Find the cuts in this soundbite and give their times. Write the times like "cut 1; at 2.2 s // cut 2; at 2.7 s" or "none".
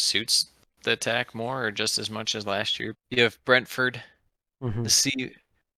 cut 1; at 2.9 s